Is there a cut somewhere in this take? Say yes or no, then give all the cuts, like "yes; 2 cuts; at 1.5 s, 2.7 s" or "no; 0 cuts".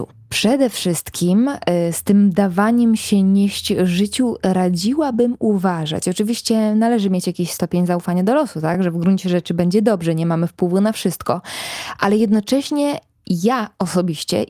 no; 0 cuts